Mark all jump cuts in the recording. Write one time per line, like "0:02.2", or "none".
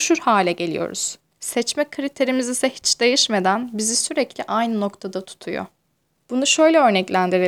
0:01.3